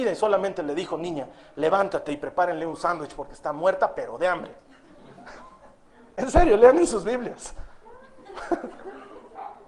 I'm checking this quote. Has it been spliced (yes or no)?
no